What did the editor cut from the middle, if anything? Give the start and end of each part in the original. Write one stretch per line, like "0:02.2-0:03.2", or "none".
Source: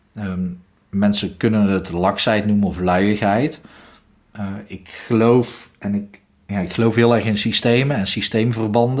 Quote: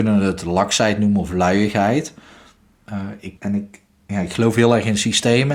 0:04.8-0:05.8